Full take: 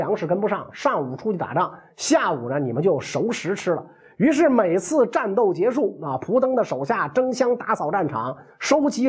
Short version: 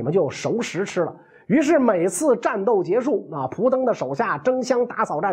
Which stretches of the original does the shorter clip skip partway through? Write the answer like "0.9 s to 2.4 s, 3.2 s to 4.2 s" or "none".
none